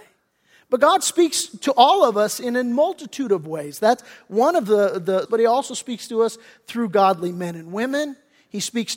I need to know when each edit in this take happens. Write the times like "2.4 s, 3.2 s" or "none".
5.3 s